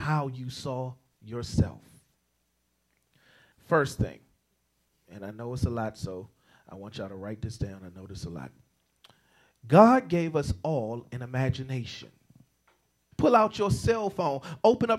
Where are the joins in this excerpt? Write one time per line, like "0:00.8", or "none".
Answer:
0:03.5
0:13.1